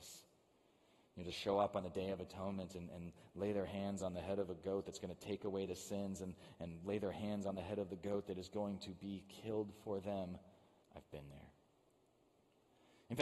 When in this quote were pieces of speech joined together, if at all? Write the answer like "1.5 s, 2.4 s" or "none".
10.8 s